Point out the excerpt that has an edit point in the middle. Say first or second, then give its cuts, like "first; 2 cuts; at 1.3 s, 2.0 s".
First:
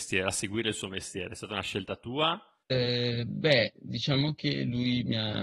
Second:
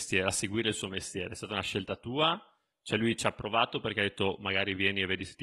first; 1 cut; at 2.6 s